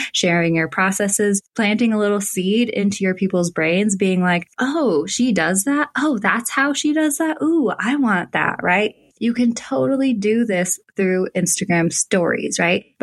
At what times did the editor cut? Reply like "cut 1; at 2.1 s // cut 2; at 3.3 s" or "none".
cut 1; at 9.1 s